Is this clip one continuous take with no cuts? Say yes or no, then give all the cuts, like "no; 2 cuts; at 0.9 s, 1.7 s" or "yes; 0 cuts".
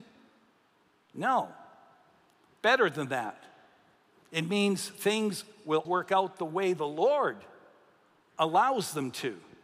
no; 1 cut; at 5.8 s